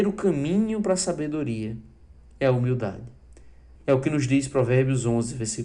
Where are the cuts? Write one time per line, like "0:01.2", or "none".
0:03.8